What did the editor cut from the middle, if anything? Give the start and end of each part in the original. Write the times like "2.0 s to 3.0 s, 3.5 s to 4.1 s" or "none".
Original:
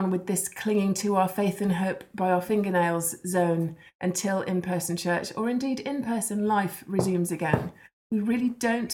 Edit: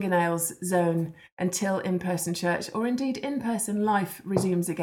none